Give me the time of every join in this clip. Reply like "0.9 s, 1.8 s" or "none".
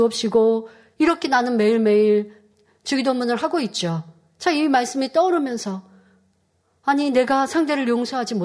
none